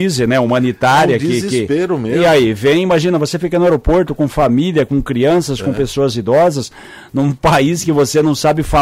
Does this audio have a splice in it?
no; 0 cuts

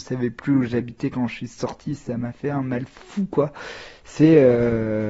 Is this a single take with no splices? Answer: yes; 0 cuts

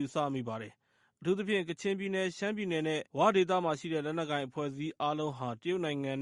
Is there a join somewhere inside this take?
yes; 1 cut; at 3.1 s

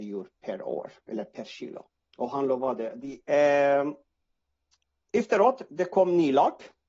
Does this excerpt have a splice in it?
yes; 2 cuts; at 2.1 s, 3.2 s

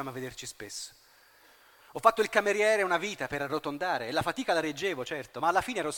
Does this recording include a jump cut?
no; 0 cuts

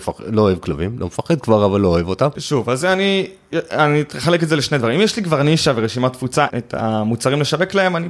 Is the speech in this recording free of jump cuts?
no; 2 cuts; at 2.3 s, 6.5 s

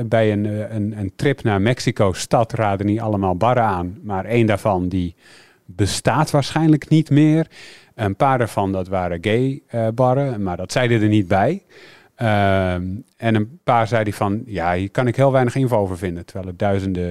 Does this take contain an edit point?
no; 0 cuts

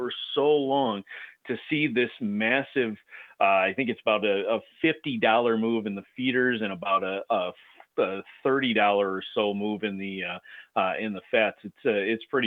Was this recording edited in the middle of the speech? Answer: no; 0 cuts

